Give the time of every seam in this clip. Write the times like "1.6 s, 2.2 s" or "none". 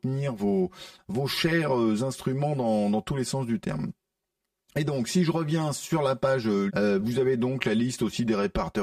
6.7 s